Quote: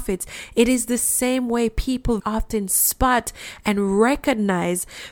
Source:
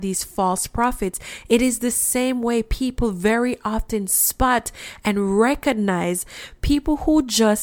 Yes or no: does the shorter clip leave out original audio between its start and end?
yes